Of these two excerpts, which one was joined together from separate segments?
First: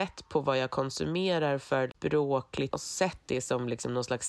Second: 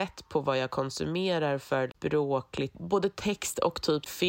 first; 1 cut; at 2.7 s

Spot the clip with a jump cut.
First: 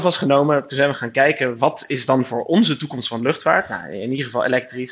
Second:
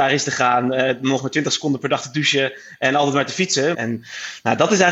second; 1 cut; at 3.7 s

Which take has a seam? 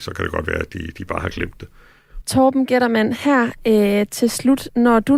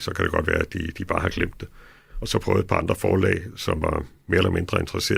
first; 1 cut; at 2.2 s

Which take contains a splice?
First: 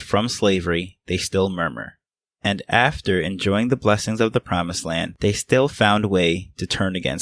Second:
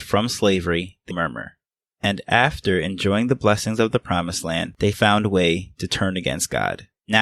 second; 2 cuts; at 1.1 s, 4.9 s

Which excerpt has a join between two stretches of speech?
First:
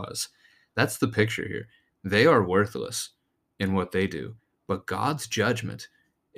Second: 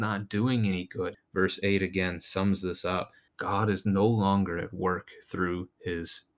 second; 2 cuts; at 1.1 s, 3.3 s

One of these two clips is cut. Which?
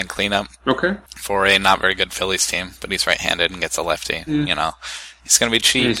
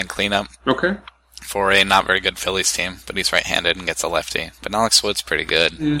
first; 2 cuts; at 1.1 s, 4.3 s

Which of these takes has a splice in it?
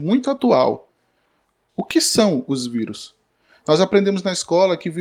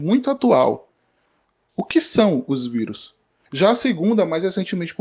second; 1 cut; at 3.5 s

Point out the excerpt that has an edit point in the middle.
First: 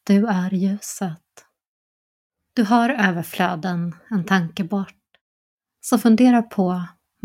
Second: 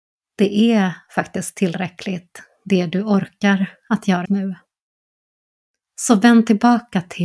second; 1 cut; at 4.2 s

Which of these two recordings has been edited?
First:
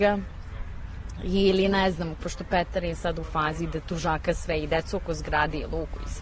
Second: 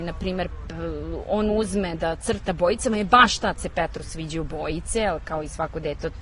first; 1 cut; at 2.2 s

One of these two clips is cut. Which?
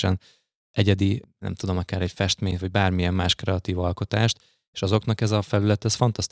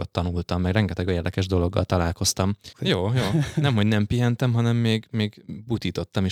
second; 1 cut; at 2.7 s

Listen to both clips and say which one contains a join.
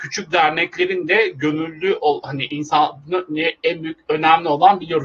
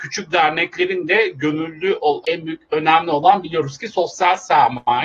second; 1 cut; at 2.2 s

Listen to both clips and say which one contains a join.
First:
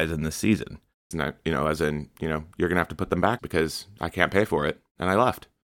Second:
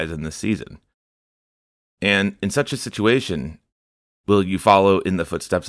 first; 2 cuts; at 1.1 s, 3.4 s

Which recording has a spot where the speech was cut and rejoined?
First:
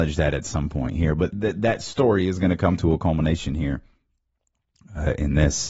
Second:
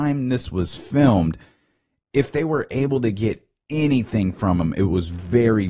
first; 1 cut; at 1.3 s

